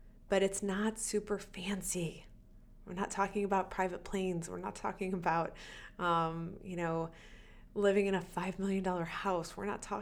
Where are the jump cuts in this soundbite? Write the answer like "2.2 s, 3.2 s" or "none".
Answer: none